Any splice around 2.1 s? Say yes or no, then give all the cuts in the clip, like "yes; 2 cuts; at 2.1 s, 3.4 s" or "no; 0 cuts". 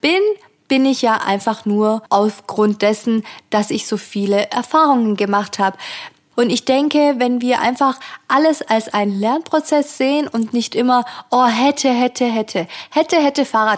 yes; 2 cuts; at 2.1 s, 6.3 s